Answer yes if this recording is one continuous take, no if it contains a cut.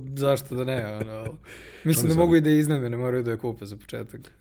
yes